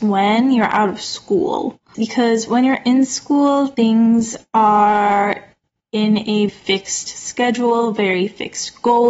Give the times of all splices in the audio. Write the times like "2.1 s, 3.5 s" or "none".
1.9 s, 6.5 s